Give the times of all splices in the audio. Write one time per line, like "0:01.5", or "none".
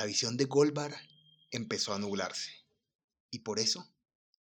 0:03.1